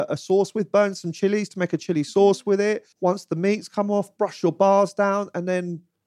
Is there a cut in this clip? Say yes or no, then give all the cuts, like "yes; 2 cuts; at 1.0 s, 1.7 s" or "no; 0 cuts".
yes; 2 cuts; at 2.9 s, 4.2 s